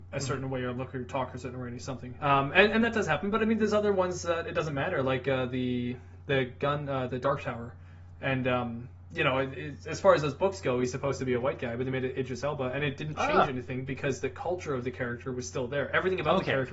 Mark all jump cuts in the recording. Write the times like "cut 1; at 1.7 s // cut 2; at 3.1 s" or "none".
cut 1; at 2.2 s // cut 2; at 7.1 s // cut 3; at 8.2 s

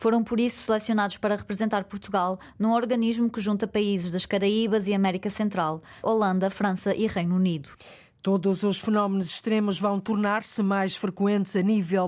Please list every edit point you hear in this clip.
cut 1; at 6.0 s

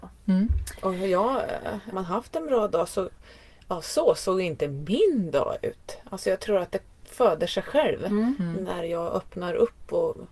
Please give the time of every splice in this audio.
cut 1; at 1.9 s

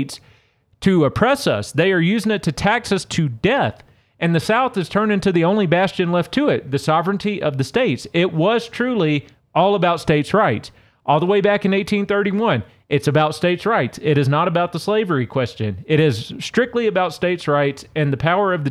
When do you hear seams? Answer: none

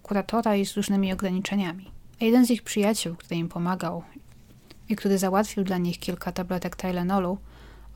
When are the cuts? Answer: cut 1; at 2.1 s

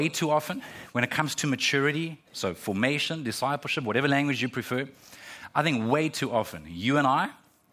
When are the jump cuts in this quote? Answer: none

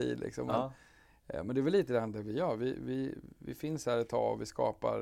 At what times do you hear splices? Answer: none

